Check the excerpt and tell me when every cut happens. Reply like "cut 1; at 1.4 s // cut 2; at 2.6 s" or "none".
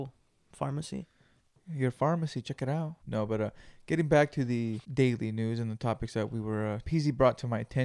cut 1; at 3.0 s // cut 2; at 4.8 s // cut 3; at 6.8 s